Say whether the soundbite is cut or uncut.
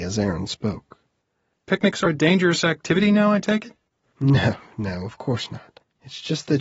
cut